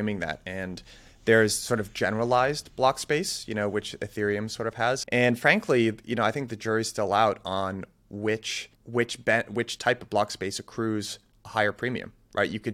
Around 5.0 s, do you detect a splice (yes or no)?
yes